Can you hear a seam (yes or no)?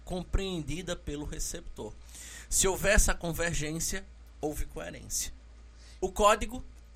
yes